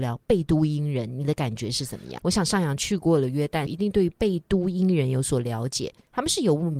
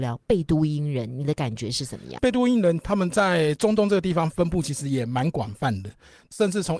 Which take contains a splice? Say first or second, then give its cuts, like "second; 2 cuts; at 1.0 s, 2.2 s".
first; 2 cuts; at 2.2 s, 3.7 s